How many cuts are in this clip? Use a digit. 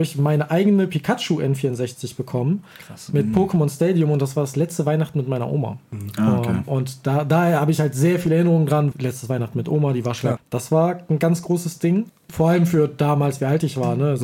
3